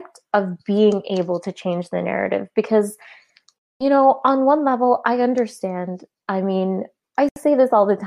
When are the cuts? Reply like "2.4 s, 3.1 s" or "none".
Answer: 7.0 s